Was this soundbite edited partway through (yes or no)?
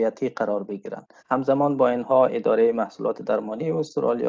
yes